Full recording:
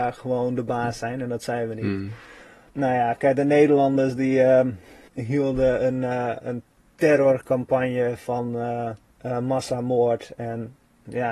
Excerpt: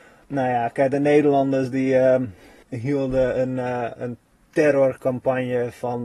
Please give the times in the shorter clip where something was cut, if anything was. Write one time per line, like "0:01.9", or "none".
none